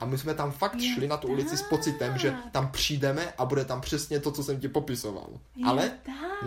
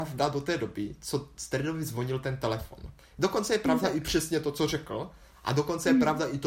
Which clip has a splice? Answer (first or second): first